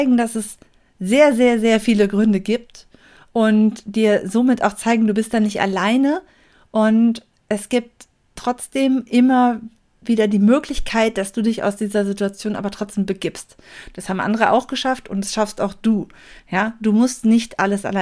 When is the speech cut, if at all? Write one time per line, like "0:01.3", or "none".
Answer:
none